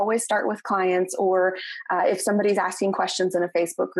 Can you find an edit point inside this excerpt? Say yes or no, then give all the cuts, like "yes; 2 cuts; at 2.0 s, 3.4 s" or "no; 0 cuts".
no; 0 cuts